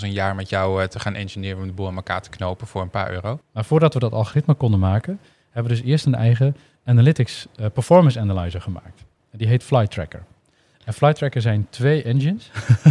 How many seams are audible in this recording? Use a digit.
1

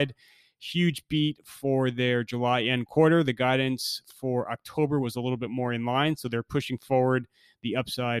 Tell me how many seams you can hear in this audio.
0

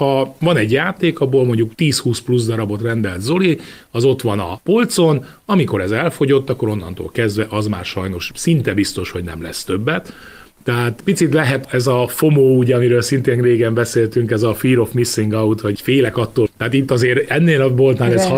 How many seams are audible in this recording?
1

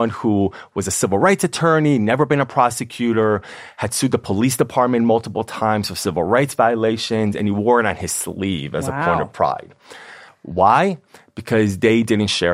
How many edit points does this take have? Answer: 1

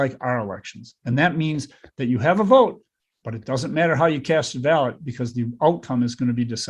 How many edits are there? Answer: 0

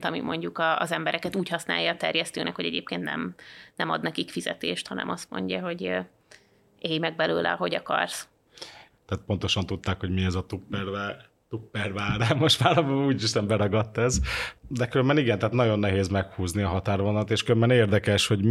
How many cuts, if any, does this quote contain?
1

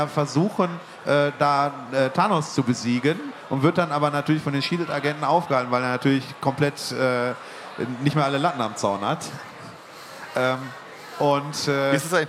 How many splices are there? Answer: 0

